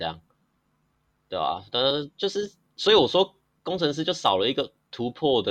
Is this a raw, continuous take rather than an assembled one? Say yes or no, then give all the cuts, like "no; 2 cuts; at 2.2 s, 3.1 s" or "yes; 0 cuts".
yes; 0 cuts